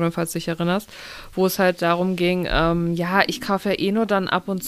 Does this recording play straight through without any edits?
yes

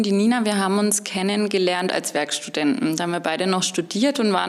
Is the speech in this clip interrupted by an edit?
no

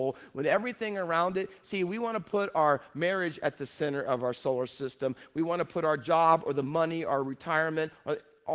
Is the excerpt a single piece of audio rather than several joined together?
yes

